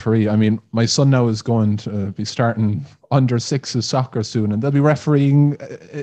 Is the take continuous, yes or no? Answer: yes